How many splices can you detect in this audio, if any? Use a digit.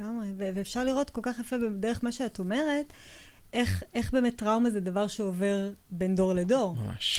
1